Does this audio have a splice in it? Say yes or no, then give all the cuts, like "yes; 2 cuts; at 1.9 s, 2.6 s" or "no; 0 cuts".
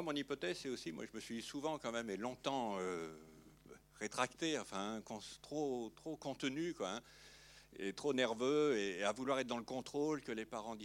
no; 0 cuts